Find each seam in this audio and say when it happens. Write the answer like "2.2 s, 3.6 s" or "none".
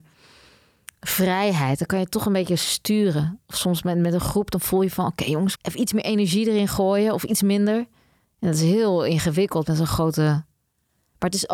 5.6 s